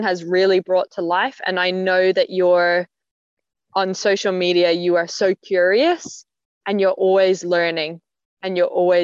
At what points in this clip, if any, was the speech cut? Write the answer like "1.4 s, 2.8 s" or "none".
none